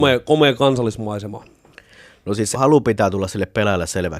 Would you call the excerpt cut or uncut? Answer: cut